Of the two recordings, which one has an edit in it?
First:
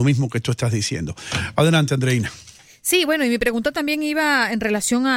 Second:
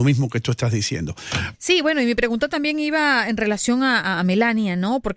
second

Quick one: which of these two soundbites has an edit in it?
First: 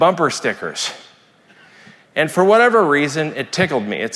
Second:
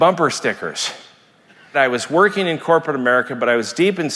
second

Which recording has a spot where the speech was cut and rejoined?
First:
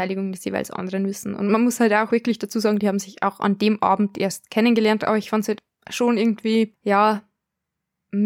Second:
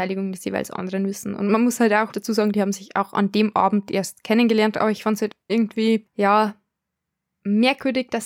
second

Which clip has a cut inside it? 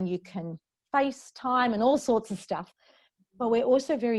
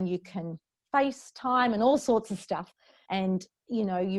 second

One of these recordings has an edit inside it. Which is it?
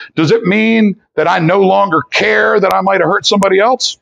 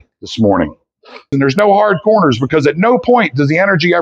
second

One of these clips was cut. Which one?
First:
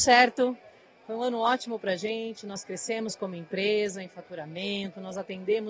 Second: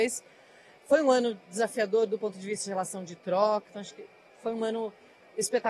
second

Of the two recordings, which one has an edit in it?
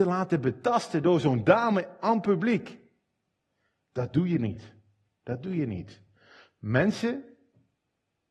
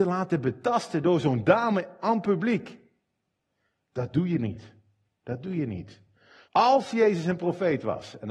second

